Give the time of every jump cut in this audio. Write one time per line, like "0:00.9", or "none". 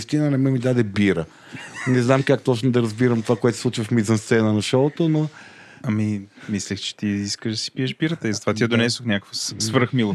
none